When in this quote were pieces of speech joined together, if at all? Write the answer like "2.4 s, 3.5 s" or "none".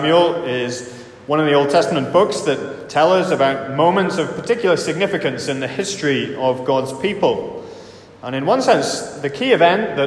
none